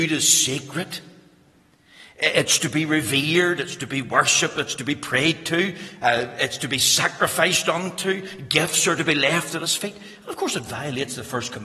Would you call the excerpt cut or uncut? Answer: uncut